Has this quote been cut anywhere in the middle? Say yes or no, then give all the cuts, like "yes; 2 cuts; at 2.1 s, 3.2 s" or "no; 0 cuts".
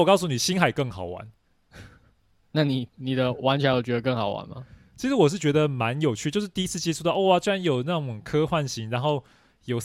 no; 0 cuts